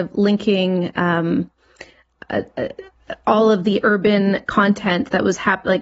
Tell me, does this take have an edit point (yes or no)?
no